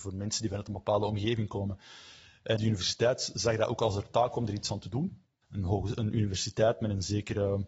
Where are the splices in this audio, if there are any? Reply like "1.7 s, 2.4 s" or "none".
2.6 s, 5.4 s